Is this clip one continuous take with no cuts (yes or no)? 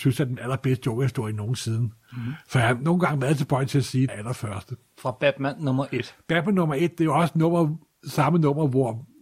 no